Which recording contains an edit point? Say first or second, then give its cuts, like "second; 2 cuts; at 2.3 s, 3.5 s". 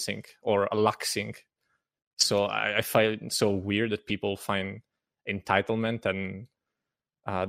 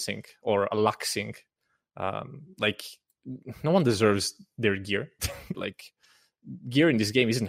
second; 2 cuts; at 1.8 s, 5.5 s